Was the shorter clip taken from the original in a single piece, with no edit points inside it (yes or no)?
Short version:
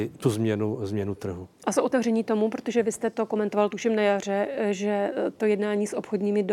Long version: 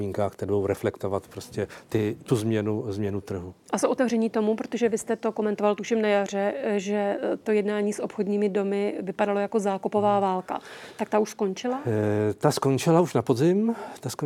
yes